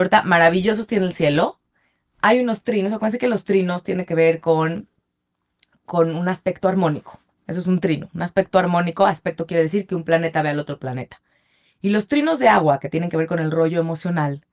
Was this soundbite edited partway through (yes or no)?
no